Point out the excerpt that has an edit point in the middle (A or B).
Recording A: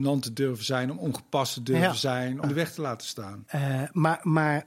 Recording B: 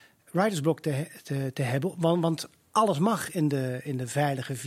A